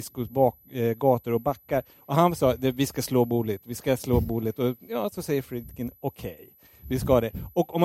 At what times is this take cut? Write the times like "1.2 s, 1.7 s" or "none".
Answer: none